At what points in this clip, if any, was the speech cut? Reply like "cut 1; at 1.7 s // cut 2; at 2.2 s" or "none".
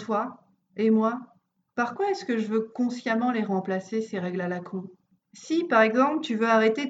none

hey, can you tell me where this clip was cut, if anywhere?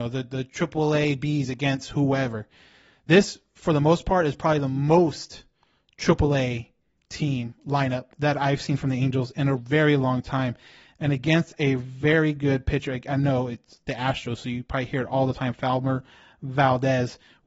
none

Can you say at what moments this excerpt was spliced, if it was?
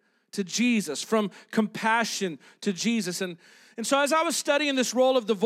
cut 1; at 3.2 s

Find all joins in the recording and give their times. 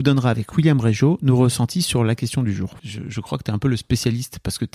cut 1; at 2.8 s

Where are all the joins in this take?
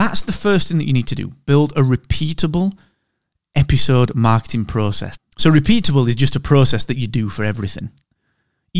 cut 1; at 5.2 s

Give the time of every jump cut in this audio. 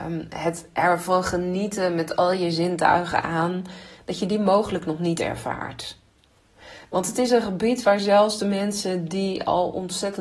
none

